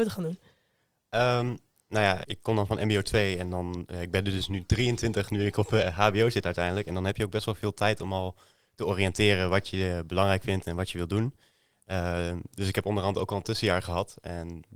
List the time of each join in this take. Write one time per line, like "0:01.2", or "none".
0:02.2